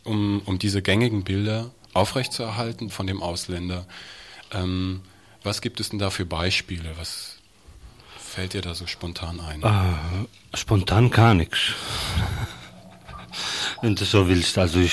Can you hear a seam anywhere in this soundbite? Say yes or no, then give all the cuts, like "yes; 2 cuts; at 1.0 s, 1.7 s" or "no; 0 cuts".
yes; 1 cut; at 2.9 s